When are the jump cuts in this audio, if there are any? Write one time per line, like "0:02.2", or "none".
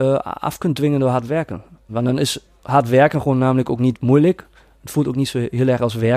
0:01.9